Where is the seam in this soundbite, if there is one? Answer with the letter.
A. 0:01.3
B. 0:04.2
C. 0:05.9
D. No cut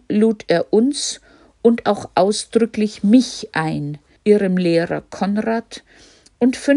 B